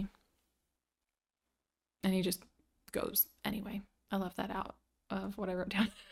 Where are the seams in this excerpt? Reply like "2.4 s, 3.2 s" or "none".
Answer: none